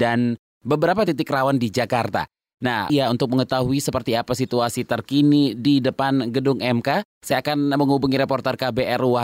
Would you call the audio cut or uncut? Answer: cut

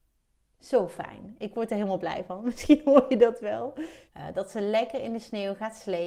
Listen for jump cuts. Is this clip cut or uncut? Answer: cut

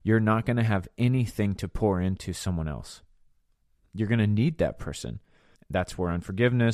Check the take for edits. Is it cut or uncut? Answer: cut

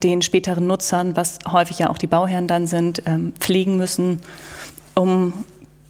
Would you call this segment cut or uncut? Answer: uncut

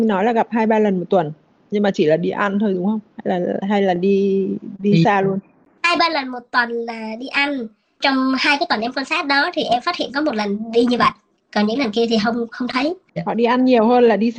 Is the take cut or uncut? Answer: uncut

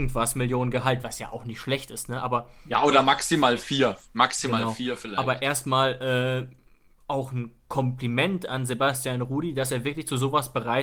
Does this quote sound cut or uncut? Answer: uncut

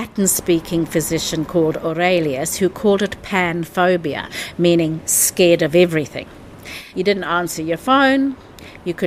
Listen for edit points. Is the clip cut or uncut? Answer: cut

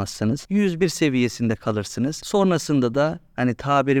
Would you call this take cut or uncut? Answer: uncut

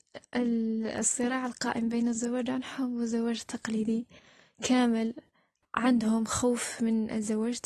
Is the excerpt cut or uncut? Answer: uncut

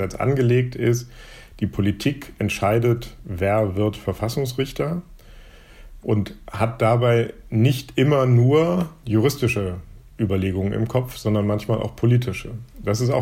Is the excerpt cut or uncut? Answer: uncut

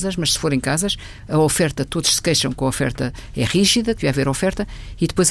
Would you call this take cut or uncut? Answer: cut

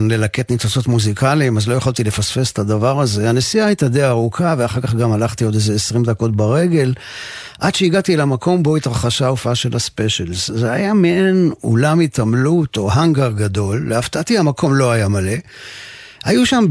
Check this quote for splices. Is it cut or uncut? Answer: uncut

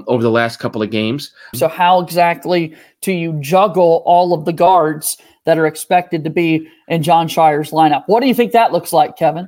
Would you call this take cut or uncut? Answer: cut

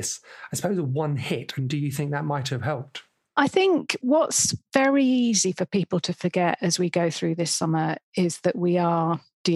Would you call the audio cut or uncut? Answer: uncut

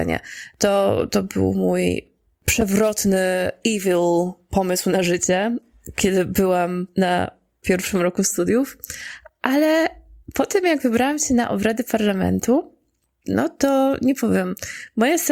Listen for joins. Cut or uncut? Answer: uncut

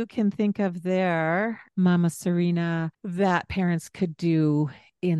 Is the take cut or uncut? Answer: cut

